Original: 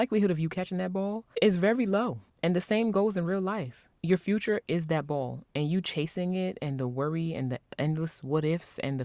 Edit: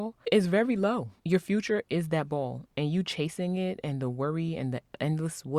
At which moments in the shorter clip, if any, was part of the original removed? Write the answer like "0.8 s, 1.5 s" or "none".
1.2 s